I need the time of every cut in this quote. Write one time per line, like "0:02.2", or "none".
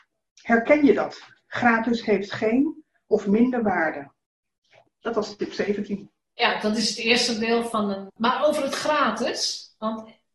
0:08.1